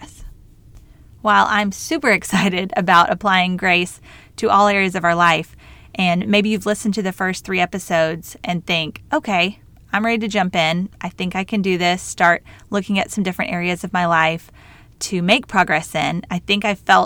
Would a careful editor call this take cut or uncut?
uncut